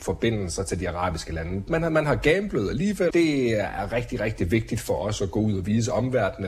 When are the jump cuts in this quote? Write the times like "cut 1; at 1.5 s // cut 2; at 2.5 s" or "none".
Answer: cut 1; at 1.7 s // cut 2; at 3.1 s